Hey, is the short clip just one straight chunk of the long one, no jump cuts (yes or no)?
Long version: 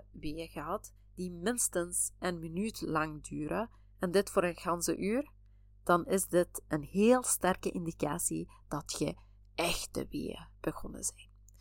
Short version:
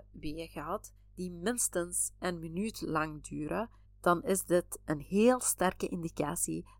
no